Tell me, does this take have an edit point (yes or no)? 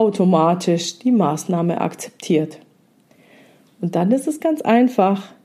no